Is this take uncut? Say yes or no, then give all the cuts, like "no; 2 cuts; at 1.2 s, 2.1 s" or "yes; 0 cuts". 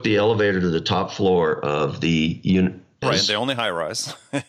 no; 1 cut; at 3.0 s